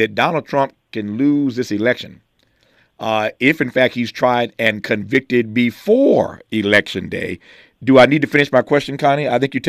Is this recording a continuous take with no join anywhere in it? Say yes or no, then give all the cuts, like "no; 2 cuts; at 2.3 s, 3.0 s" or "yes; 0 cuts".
yes; 0 cuts